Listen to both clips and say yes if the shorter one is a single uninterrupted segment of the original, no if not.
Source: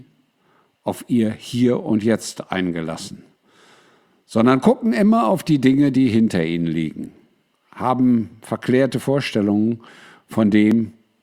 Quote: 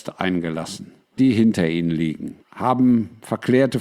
no